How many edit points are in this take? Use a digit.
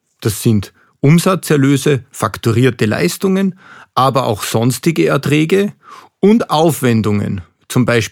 0